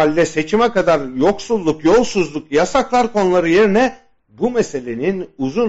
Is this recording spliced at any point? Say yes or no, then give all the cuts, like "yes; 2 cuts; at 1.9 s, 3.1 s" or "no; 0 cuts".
no; 0 cuts